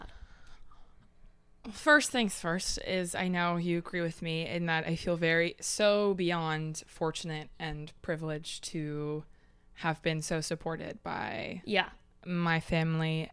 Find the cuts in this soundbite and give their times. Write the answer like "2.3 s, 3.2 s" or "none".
none